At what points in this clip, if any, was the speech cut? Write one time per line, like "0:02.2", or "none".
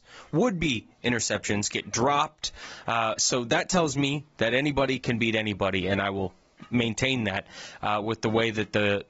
none

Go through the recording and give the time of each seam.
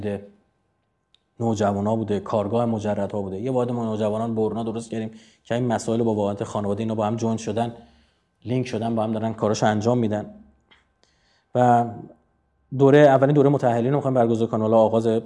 none

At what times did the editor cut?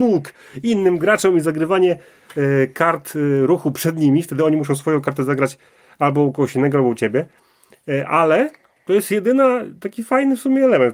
none

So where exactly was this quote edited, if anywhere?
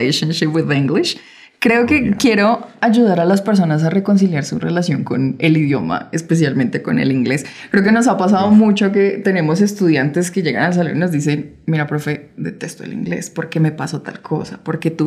none

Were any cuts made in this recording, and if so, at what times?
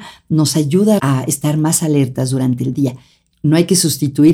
0:01.0
0:03.3

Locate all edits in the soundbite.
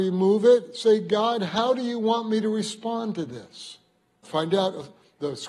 0:04.2

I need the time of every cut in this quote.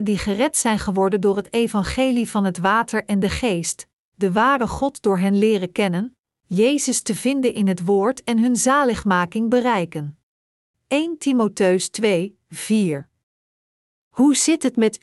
0:10.7

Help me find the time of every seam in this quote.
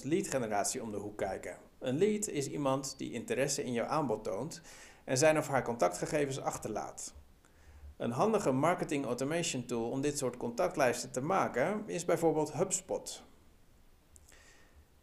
none

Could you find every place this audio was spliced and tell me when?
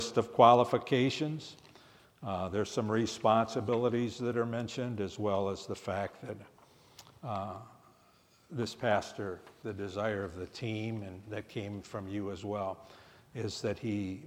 0:02.0

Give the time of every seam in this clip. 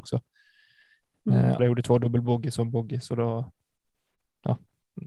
0:01.6

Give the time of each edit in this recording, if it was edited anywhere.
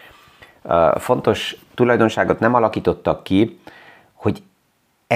none

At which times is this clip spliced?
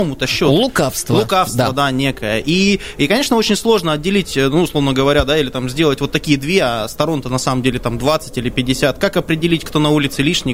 none

